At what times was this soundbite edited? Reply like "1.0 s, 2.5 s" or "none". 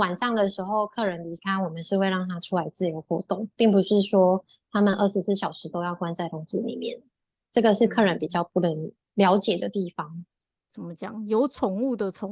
10.5 s